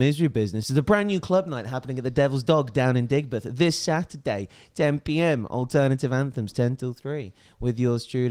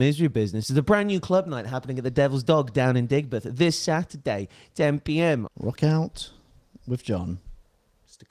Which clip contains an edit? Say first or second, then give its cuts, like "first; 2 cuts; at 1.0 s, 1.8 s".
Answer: second; 1 cut; at 5.5 s